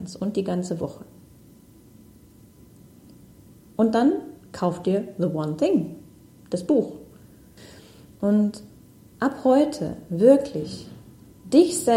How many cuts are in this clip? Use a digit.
1